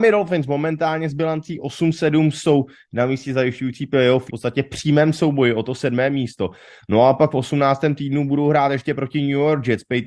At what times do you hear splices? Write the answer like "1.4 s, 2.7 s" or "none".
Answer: 4.3 s